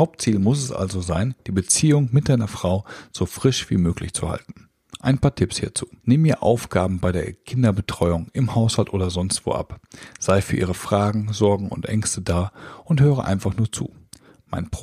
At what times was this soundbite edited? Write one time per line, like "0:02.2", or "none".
0:06.0